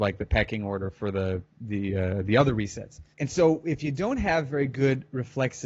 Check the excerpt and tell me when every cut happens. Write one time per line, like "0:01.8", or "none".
0:03.1